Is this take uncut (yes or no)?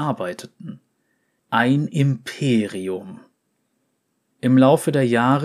no